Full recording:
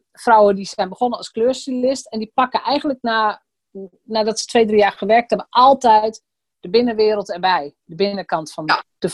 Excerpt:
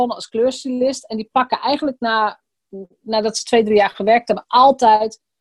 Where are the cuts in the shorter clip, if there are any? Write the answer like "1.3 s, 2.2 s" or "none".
none